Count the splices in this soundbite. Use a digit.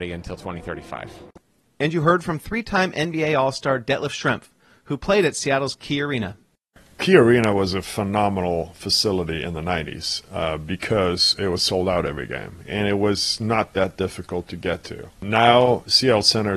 0